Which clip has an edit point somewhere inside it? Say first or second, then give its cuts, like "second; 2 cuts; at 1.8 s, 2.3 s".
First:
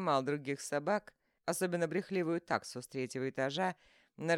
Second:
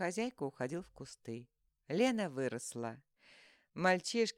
second; 1 cut; at 1.8 s